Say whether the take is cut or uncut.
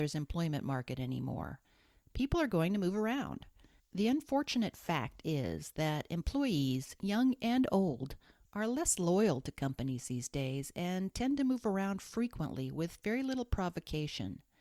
cut